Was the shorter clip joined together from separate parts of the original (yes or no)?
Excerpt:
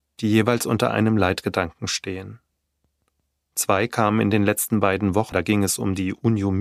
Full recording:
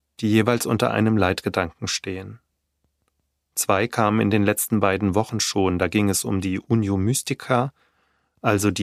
yes